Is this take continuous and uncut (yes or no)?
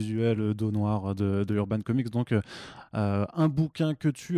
yes